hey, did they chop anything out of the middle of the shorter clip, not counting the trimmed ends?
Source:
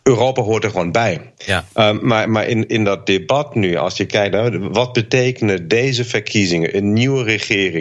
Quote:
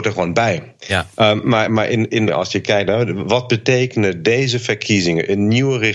yes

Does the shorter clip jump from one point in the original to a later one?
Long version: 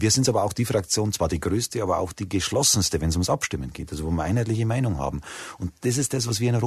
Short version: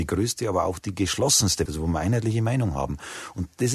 yes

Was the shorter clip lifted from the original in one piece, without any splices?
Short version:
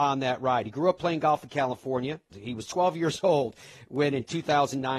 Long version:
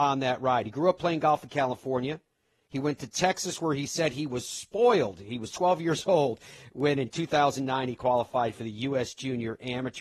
no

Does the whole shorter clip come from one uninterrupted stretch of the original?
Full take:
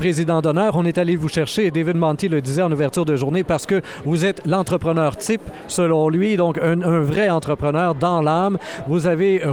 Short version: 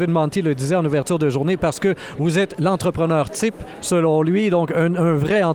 yes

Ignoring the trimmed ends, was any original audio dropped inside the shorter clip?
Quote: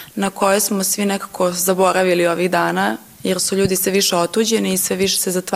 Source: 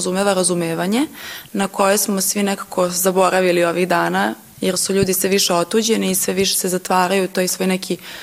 no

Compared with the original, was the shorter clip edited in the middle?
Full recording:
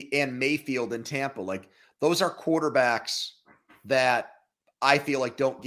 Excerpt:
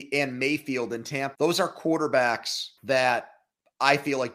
yes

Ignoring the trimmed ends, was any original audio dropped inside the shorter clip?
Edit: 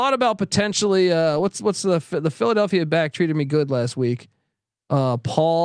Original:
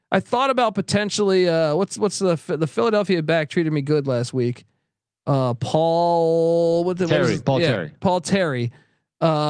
no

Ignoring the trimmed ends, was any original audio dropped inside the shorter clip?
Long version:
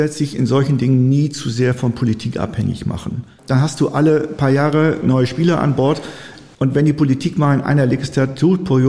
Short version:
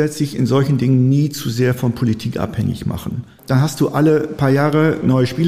no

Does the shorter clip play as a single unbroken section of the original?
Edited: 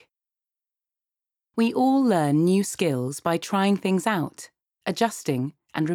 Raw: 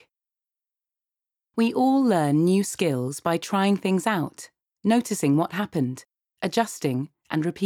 no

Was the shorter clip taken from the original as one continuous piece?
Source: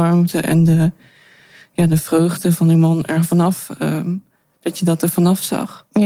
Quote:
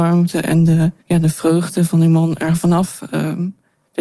no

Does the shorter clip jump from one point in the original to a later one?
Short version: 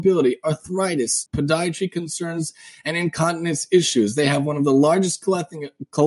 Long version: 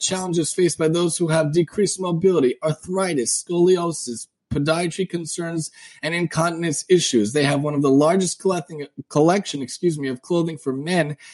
yes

